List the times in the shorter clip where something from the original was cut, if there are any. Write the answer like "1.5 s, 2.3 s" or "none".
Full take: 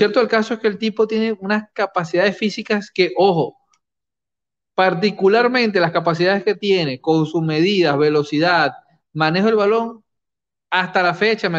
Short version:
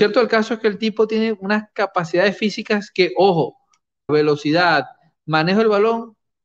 4.1 s